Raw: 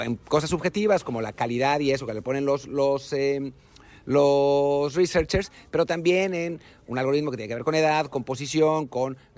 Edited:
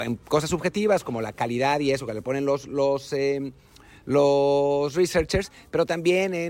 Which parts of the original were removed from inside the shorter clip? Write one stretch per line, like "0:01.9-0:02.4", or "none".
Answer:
none